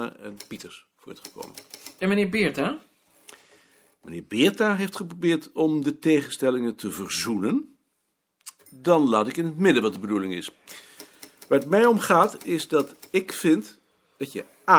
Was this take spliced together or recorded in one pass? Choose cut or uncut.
cut